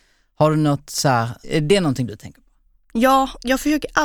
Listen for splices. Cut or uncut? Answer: cut